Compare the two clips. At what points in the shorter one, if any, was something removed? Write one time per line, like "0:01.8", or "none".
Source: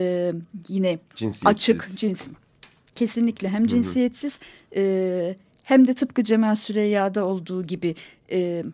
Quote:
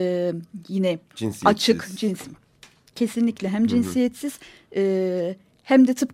none